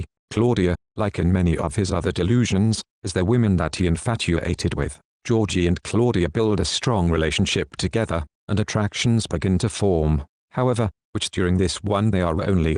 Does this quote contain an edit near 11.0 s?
yes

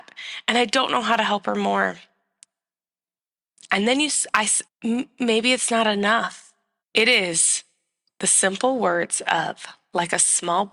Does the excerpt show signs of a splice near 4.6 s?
yes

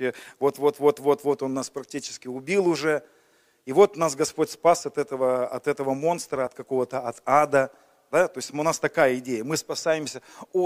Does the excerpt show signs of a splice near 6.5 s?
no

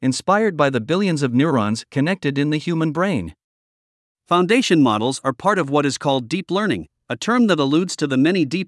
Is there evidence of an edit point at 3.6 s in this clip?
no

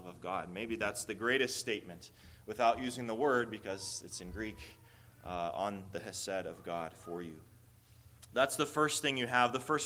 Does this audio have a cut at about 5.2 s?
no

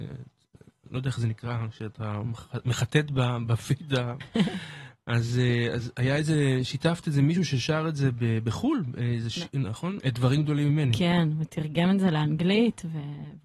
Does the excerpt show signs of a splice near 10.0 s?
yes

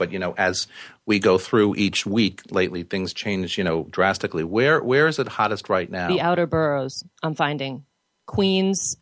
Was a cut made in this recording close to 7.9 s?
no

